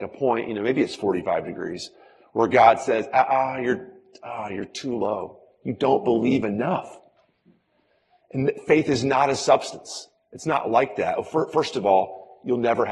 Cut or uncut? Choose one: uncut